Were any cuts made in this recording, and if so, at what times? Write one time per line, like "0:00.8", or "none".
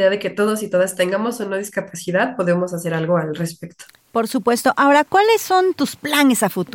none